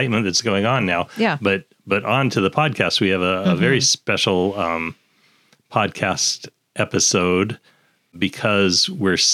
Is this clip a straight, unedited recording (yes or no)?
yes